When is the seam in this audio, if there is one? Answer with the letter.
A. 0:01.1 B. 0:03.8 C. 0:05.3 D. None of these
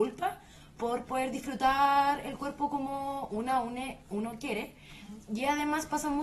D